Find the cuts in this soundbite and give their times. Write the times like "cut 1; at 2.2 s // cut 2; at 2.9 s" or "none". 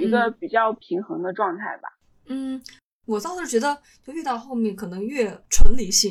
cut 1; at 2.9 s